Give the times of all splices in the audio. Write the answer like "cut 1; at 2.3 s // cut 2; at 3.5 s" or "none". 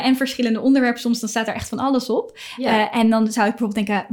none